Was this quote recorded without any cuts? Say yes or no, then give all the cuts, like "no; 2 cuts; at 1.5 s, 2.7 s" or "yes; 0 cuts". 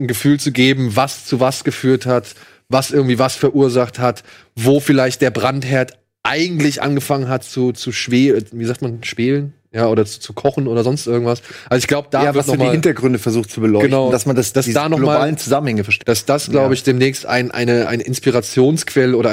no; 1 cut; at 16.0 s